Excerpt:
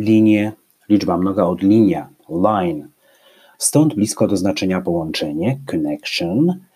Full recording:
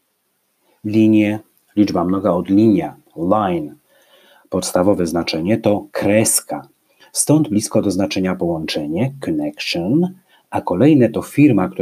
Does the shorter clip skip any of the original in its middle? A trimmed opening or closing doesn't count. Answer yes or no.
yes